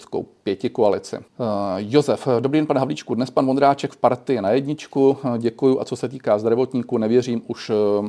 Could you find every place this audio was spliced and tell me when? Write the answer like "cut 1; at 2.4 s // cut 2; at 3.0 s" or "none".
cut 1; at 1.3 s